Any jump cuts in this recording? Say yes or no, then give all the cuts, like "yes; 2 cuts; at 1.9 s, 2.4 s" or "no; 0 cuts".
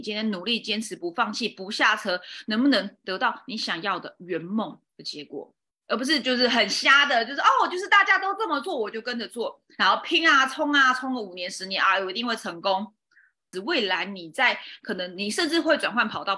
yes; 1 cut; at 13.5 s